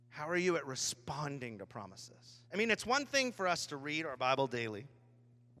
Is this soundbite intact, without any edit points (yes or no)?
no